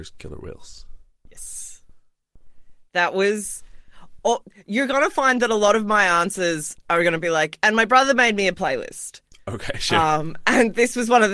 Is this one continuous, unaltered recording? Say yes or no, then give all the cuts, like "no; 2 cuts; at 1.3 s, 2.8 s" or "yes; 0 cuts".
yes; 0 cuts